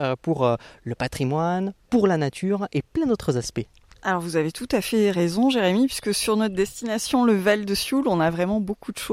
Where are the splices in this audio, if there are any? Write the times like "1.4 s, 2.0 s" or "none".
none